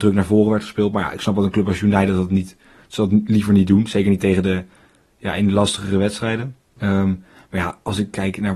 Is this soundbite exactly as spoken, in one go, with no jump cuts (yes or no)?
no